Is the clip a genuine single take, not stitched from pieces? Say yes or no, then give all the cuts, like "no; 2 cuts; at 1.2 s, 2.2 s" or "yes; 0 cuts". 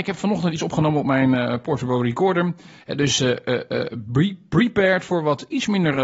no; 1 cut; at 2.8 s